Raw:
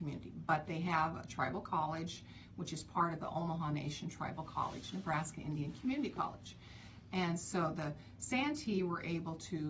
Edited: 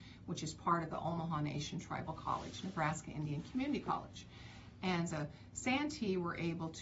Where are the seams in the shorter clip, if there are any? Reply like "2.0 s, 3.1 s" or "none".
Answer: 5.1 s